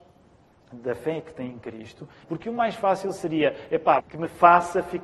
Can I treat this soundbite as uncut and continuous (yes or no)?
no